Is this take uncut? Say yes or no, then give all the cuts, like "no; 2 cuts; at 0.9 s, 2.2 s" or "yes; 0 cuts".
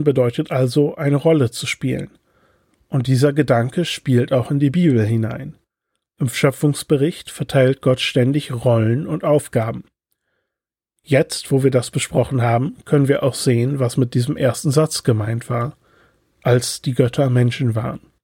yes; 0 cuts